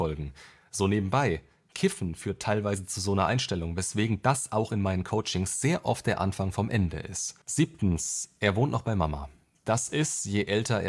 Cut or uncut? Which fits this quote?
cut